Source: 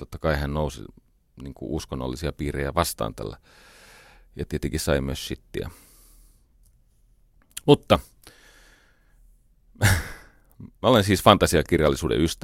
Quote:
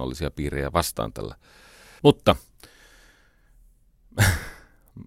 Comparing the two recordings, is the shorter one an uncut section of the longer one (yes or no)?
no